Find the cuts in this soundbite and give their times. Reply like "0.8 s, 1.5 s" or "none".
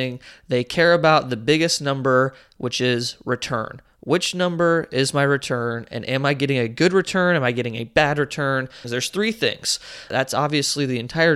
8.8 s, 10.1 s